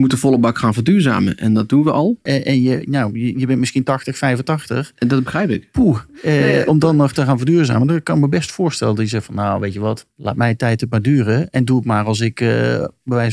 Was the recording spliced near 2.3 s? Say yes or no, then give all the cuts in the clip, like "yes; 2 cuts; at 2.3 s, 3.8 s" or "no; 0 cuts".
yes; 1 cut; at 2.3 s